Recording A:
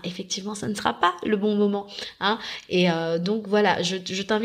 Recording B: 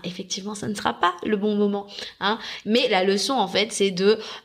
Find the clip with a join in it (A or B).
B